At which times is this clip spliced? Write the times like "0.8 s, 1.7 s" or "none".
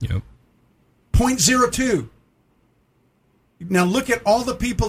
none